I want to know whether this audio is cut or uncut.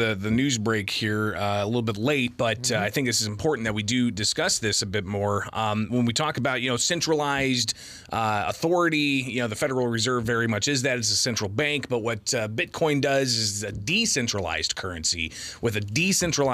uncut